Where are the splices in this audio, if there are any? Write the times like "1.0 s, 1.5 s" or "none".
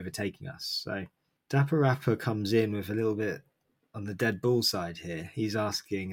none